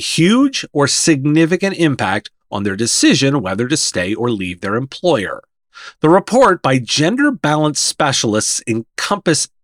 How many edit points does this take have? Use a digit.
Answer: 1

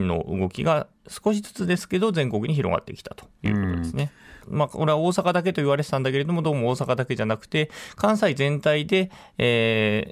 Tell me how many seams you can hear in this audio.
1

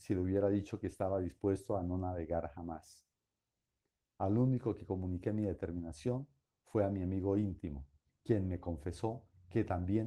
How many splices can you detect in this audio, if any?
1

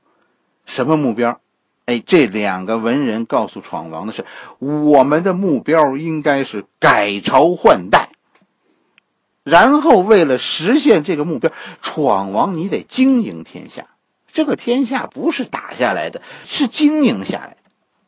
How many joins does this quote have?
1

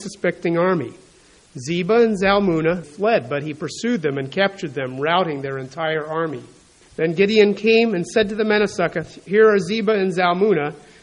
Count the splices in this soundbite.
2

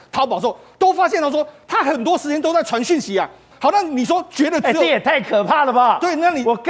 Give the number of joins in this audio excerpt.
1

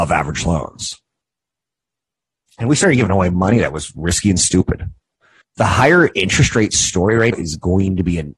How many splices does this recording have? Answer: 2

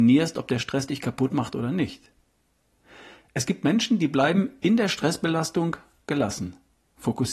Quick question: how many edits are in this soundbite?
0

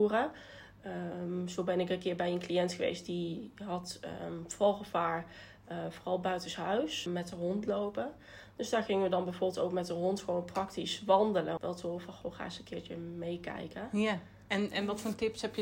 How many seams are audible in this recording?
2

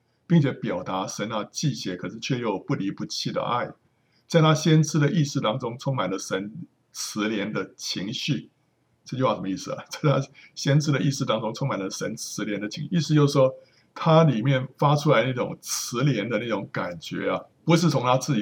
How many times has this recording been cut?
1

